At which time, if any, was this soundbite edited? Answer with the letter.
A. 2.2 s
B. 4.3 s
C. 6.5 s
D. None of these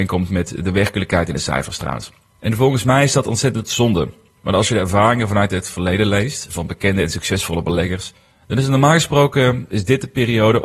C